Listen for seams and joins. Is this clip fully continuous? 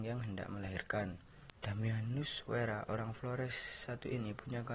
no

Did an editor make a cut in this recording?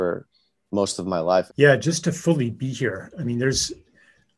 yes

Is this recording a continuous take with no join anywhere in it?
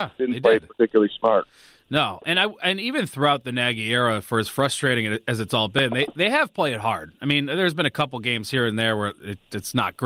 yes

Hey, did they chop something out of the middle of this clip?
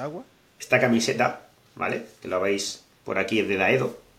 no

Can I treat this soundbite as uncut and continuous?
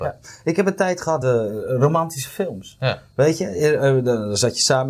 yes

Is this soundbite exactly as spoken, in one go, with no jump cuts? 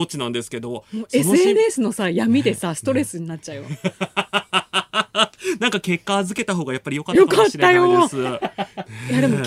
yes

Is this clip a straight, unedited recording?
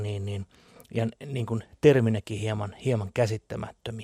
yes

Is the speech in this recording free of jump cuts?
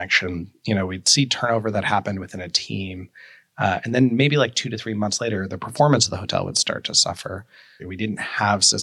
no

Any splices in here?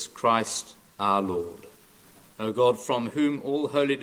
yes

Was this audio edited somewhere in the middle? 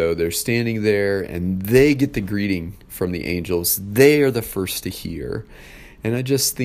no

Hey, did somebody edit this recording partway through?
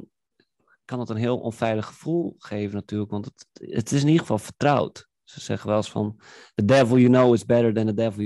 no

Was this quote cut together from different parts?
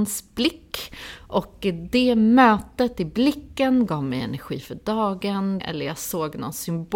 yes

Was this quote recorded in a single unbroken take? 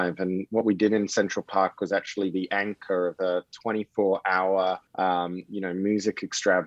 no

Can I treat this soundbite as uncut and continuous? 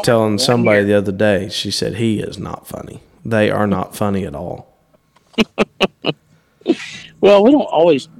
yes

